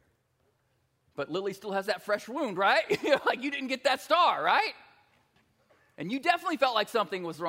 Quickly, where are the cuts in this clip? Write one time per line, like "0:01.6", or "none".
none